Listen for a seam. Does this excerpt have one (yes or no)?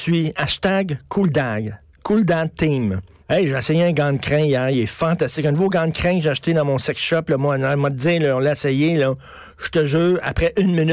yes